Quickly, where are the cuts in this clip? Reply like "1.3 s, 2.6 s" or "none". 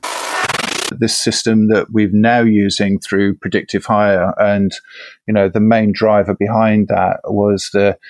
none